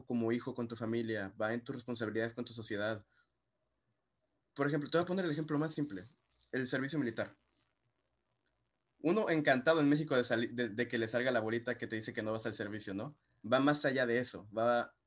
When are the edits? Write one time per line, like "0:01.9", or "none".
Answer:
0:13.4